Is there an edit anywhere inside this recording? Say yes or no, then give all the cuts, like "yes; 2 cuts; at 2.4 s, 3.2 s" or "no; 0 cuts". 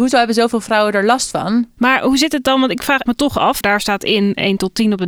yes; 2 cuts; at 1.8 s, 3.6 s